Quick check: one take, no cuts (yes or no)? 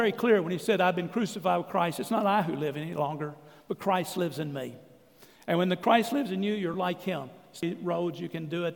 yes